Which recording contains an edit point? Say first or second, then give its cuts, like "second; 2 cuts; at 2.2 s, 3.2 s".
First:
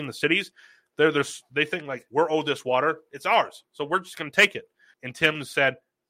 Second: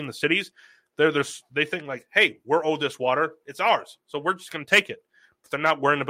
first; 2 cuts; at 2.1 s, 4.9 s